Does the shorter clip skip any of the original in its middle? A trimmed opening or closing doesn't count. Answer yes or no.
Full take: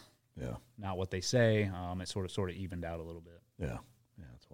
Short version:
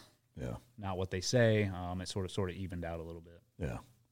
no